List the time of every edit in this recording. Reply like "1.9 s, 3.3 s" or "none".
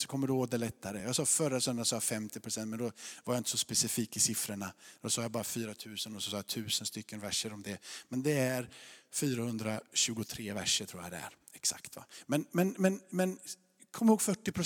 none